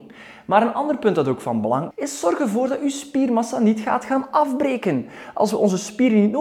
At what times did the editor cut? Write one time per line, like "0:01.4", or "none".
0:01.9